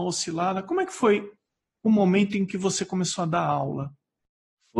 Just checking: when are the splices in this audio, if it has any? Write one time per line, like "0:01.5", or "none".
none